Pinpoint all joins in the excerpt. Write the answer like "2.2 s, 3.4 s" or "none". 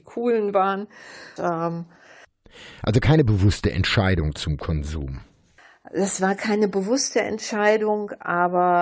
1.4 s

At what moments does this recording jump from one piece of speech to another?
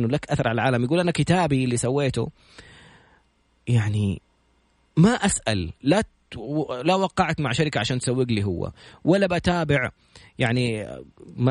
none

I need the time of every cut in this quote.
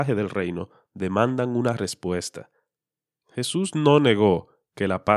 3.2 s

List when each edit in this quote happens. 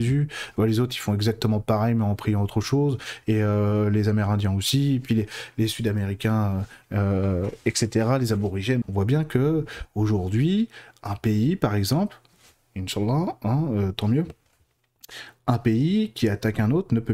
8.8 s

